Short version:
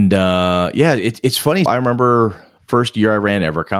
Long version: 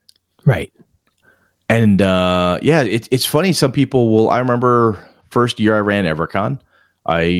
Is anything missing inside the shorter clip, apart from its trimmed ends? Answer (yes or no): yes